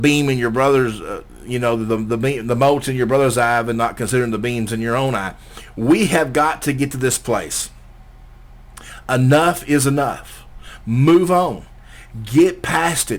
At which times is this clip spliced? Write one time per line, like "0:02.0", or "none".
none

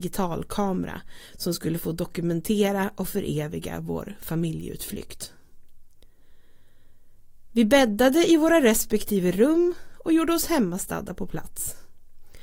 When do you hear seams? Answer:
none

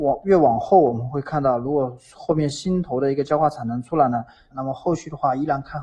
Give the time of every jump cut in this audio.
0:04.5

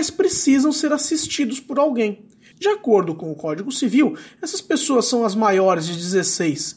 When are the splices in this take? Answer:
0:02.5

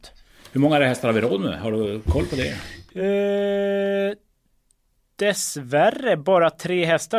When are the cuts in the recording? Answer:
none

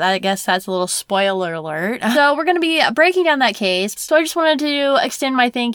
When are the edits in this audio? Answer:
0:02.1
0:04.0

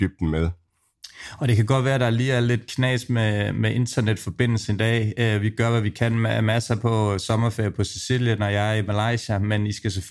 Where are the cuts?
none

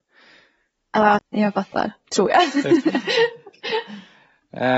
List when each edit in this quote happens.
0:01.2

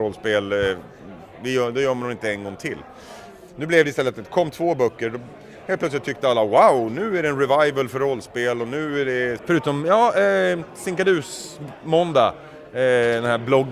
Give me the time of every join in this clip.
0:09.4

